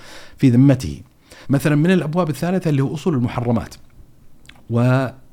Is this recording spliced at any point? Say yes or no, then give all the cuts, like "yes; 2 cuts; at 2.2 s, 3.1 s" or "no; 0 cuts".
yes; 1 cut; at 1.4 s